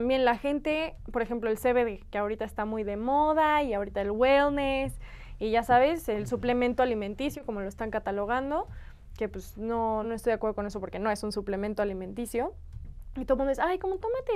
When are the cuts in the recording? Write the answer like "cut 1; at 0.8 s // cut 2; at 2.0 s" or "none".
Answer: cut 1; at 10.0 s